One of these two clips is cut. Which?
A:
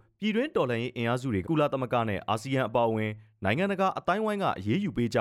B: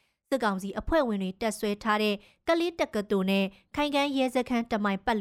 A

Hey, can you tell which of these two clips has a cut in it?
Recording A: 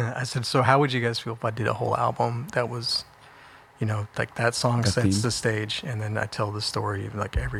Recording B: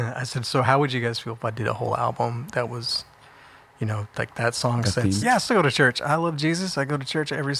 B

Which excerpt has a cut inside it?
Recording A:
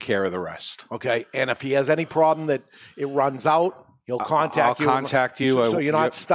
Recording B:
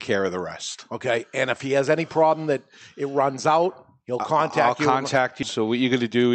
B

